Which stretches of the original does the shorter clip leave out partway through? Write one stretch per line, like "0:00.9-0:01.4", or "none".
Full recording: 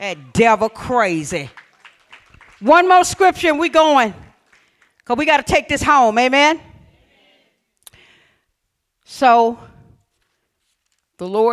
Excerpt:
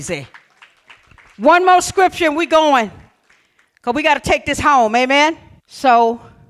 0:06.8-0:08.9

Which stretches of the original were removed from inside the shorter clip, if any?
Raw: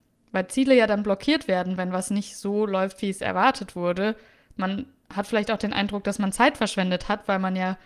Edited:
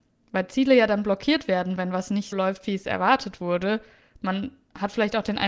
0:02.3-0:02.7

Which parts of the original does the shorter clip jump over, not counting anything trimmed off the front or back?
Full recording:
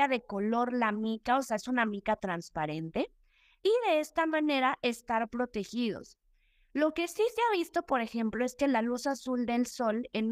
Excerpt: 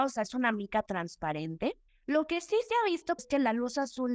0:03.2-0:06.6
0:07.9-0:08.5

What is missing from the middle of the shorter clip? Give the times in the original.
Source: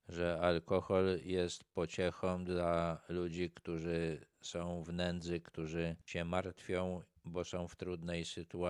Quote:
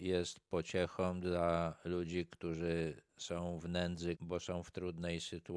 0:05.4-0:07.2

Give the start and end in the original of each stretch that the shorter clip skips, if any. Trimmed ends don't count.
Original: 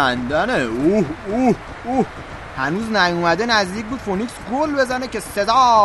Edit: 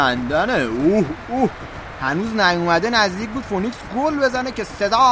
0:01.2-0:01.8

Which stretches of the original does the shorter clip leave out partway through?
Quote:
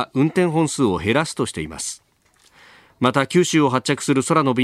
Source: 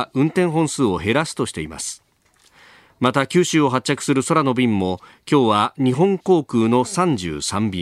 none

